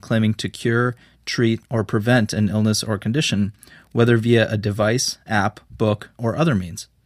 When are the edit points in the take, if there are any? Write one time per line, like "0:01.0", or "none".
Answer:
0:06.1